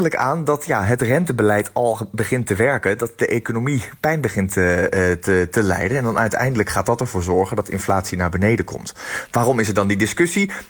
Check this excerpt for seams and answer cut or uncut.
uncut